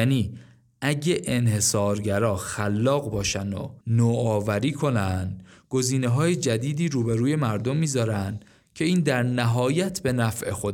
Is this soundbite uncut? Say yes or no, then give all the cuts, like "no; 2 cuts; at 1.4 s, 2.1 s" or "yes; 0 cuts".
no; 1 cut; at 3.8 s